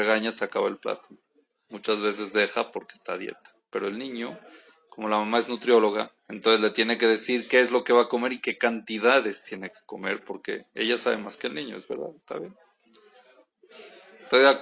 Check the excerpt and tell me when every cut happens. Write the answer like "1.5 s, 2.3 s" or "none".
6.2 s